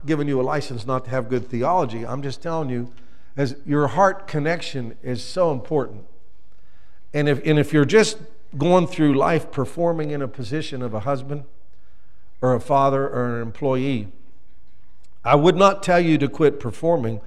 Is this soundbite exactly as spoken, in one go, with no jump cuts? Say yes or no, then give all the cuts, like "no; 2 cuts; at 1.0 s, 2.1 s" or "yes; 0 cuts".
yes; 0 cuts